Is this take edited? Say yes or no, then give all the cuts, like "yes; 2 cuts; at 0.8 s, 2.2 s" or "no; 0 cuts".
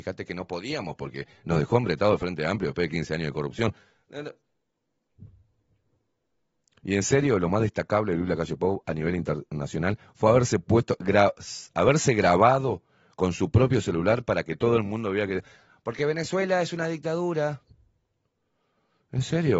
no; 0 cuts